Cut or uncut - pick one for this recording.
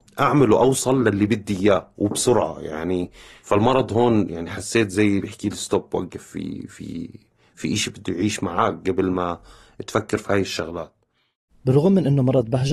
uncut